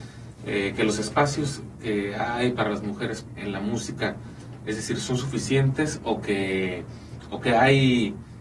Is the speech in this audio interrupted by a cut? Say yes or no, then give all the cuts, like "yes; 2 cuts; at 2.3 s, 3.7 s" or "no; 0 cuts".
yes; 1 cut; at 3.4 s